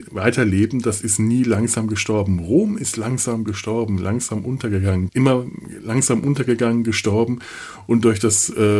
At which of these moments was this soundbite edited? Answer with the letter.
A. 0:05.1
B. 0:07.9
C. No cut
A